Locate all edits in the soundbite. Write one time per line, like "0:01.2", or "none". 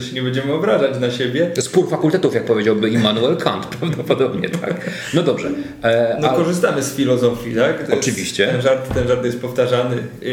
none